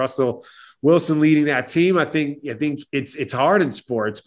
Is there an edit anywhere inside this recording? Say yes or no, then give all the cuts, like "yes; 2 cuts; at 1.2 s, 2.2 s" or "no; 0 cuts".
no; 0 cuts